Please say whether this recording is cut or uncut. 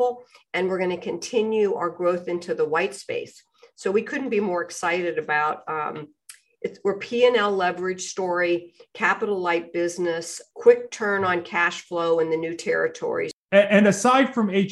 uncut